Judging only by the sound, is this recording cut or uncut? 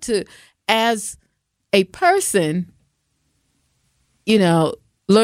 uncut